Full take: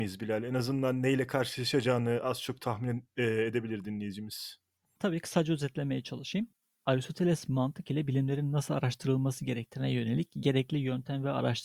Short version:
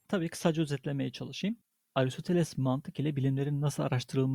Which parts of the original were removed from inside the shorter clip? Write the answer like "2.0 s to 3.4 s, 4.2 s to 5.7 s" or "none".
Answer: none